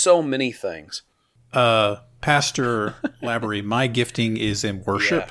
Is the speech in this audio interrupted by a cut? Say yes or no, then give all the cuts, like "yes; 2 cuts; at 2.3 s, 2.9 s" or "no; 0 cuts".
no; 0 cuts